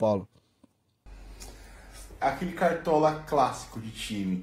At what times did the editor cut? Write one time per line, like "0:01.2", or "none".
0:02.2